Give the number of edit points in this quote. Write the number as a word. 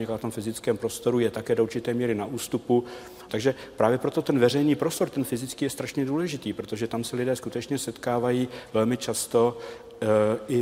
one